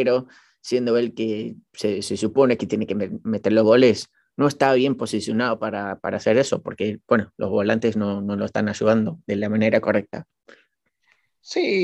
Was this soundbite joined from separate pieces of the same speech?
no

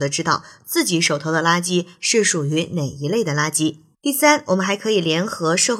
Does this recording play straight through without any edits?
no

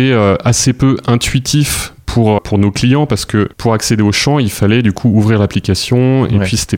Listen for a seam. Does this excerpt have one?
yes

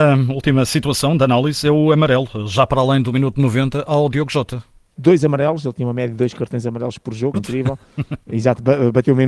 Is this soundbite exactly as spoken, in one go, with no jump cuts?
no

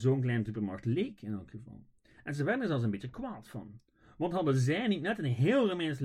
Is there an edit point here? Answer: no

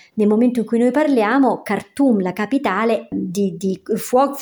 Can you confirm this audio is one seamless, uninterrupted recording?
no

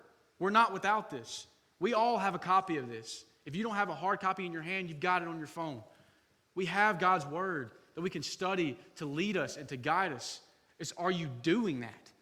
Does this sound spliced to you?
no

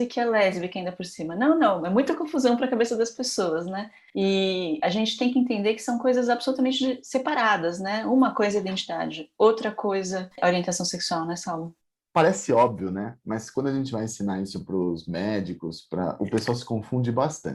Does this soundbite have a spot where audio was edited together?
no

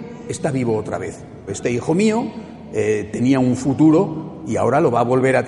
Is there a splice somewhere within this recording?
yes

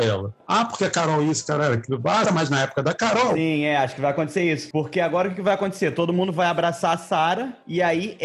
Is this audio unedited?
no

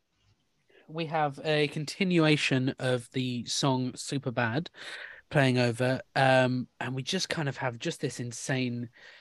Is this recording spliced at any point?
no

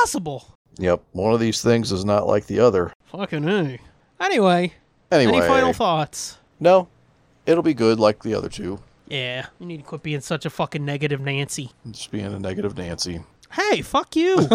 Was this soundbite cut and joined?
yes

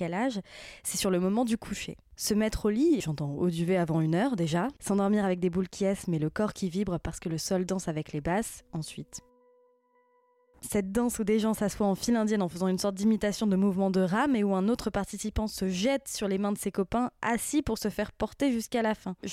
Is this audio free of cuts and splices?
no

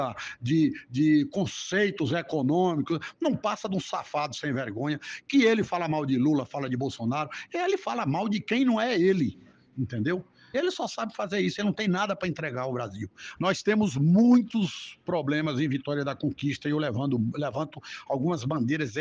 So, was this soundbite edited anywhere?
yes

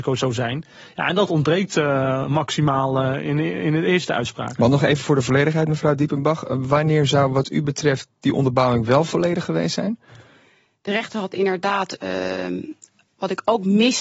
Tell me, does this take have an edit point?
no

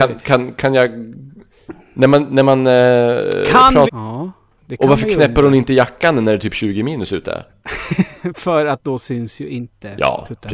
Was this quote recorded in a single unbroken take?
no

